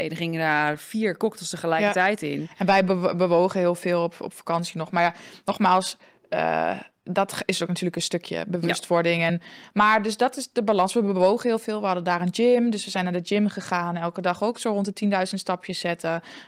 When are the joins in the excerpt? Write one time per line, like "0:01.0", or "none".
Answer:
none